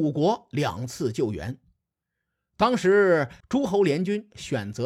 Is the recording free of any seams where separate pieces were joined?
no; 1 cut; at 3.4 s

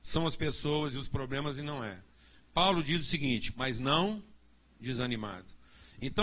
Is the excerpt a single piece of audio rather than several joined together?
no; 1 cut; at 3.5 s

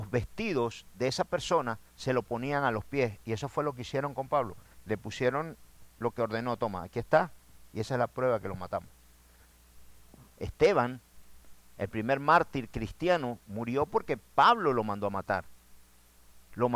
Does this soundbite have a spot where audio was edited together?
yes; 1 cut; at 10.3 s

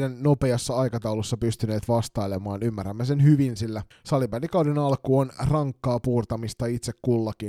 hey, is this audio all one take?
yes; 0 cuts

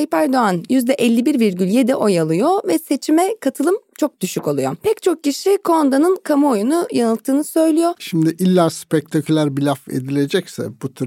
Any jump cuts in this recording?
yes; 1 cut; at 7.9 s

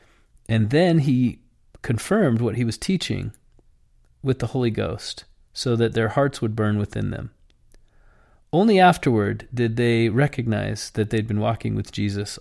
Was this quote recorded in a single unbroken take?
yes; 0 cuts

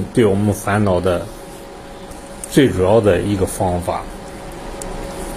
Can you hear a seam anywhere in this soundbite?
no; 0 cuts

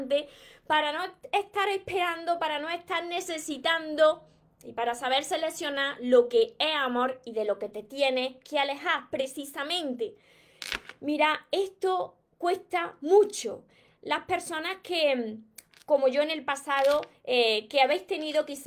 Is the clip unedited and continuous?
yes; 0 cuts

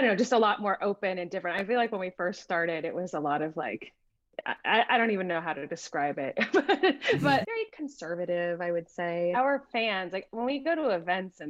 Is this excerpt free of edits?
no; 2 cuts; at 7.4 s, 9.3 s

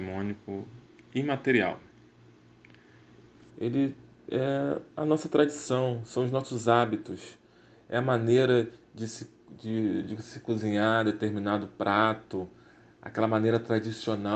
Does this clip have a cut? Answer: yes; 1 cut; at 3.5 s

